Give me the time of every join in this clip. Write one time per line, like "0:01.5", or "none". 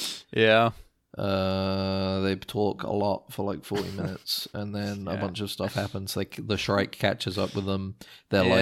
none